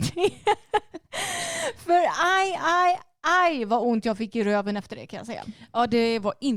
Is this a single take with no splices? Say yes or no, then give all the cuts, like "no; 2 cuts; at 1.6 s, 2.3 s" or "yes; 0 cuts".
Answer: yes; 0 cuts